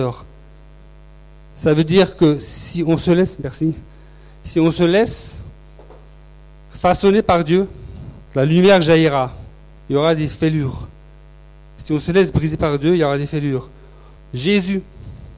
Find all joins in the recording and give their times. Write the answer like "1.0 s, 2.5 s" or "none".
8.3 s, 9.8 s, 14.2 s